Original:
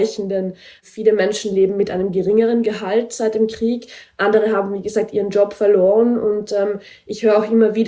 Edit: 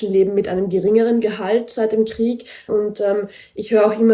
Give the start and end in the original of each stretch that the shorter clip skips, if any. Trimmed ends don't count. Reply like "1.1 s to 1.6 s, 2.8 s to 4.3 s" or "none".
4.1 s to 6.2 s